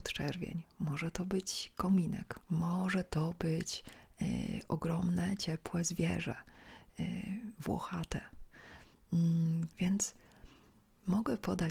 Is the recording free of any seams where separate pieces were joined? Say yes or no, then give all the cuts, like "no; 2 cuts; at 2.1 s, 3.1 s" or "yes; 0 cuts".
no; 2 cuts; at 2.4 s, 9.7 s